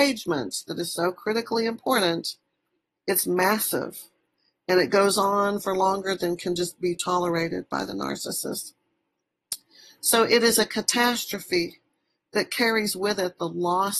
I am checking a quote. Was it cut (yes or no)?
no